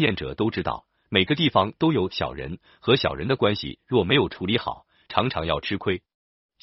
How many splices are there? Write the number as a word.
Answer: zero